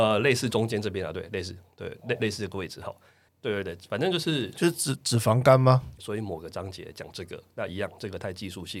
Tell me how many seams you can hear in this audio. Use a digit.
2